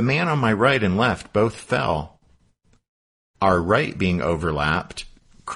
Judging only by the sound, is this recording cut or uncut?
uncut